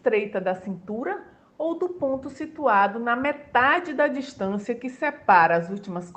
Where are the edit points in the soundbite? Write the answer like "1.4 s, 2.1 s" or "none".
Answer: none